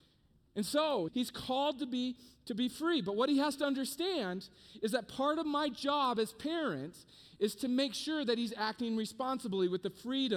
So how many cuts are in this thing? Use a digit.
1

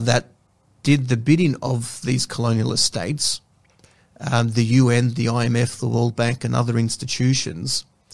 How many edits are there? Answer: 0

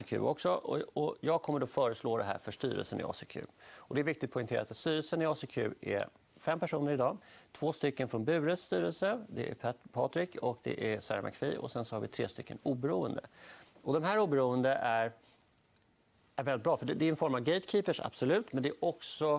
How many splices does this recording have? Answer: 0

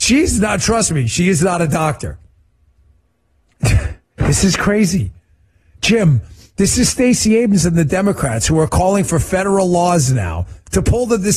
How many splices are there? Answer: 1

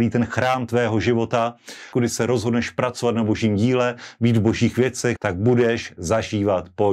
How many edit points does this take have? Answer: 2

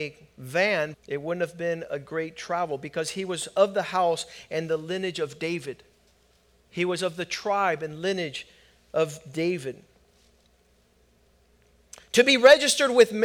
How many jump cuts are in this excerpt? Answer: 1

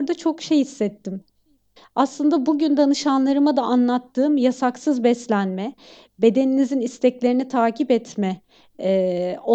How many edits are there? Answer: 1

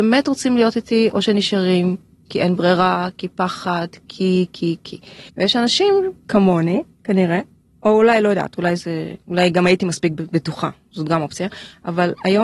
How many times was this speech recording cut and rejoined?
1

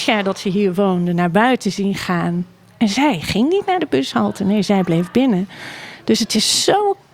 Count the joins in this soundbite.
0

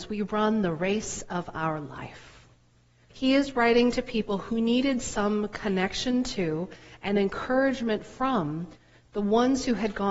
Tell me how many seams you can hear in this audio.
1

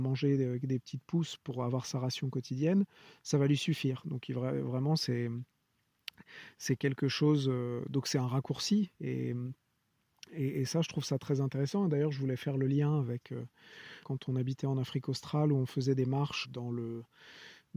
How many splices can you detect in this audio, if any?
2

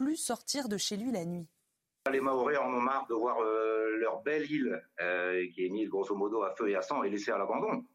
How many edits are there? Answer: 0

